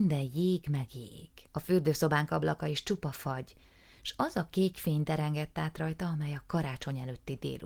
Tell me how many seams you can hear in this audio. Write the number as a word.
one